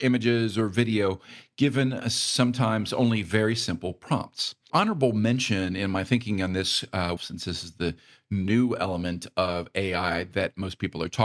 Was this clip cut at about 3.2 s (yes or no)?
no